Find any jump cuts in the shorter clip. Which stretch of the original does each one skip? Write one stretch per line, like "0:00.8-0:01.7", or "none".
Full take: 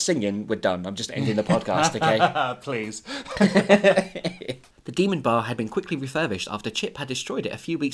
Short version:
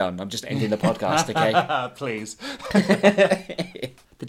none